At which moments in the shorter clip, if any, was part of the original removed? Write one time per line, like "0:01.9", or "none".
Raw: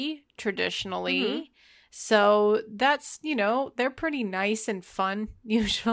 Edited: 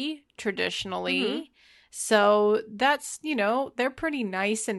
none